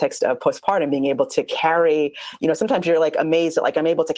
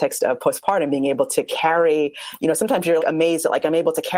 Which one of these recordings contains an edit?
second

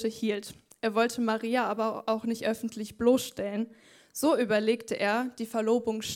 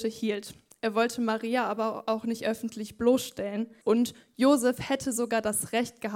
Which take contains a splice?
second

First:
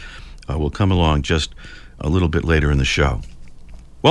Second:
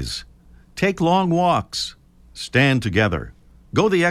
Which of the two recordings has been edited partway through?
first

